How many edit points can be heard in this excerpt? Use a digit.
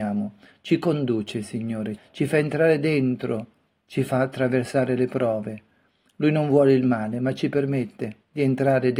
1